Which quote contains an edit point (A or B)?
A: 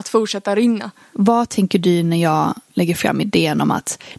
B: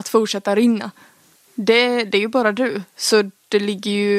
A